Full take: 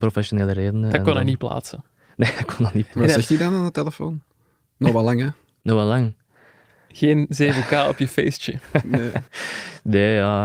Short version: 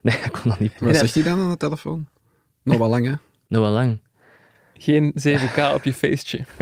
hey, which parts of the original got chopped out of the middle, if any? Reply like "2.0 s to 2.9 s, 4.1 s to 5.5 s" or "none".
none